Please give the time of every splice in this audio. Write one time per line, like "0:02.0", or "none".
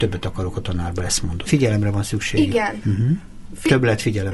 0:01.4